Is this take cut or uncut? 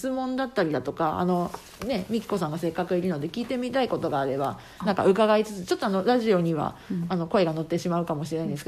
uncut